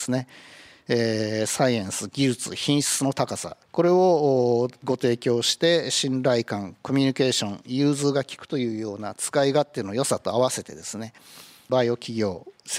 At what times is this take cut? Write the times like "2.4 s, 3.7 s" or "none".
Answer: 3.6 s